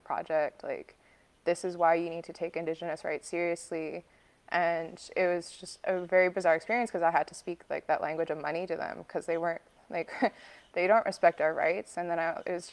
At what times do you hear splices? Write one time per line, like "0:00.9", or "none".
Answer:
none